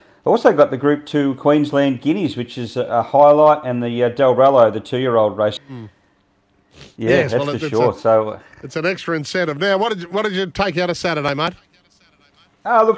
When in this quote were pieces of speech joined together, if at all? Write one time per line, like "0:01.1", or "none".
0:05.6